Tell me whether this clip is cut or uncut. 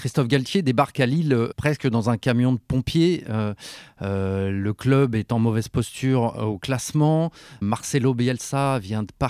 uncut